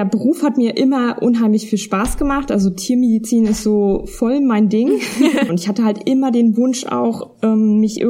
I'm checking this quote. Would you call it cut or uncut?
cut